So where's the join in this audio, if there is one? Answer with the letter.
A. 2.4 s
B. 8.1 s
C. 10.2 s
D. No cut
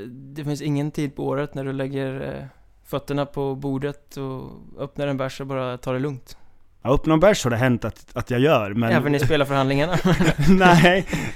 D